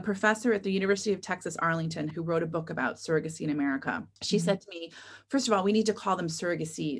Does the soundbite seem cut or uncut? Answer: cut